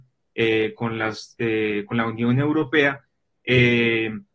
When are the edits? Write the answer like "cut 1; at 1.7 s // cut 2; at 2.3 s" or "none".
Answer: cut 1; at 3.3 s